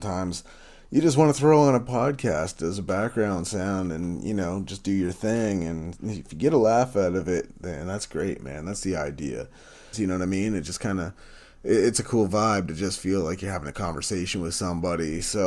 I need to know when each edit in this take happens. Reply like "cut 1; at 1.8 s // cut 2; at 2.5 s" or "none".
cut 1; at 9.9 s